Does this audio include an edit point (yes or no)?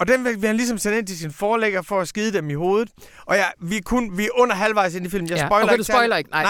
no